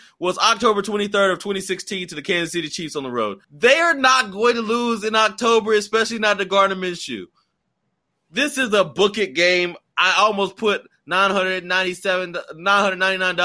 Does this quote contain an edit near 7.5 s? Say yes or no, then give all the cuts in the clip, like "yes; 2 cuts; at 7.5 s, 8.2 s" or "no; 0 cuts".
no; 1 cut; at 3.4 s